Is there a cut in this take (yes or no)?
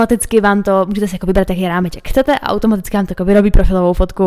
no